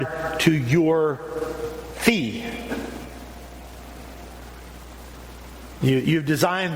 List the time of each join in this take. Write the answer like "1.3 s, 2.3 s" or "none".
none